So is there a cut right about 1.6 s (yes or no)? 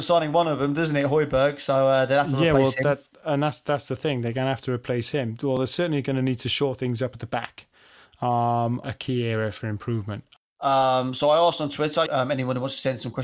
no